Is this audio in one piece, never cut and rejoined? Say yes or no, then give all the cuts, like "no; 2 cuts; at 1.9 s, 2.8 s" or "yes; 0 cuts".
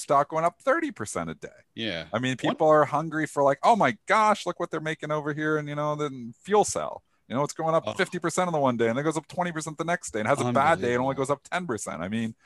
yes; 0 cuts